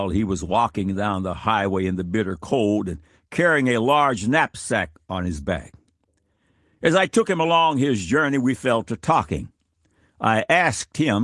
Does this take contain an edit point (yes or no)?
no